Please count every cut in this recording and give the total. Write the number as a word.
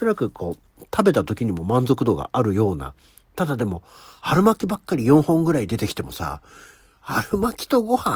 zero